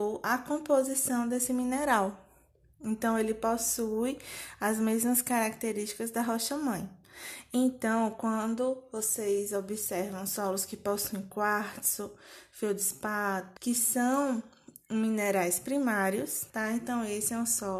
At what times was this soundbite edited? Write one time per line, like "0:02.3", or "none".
0:13.6
0:16.5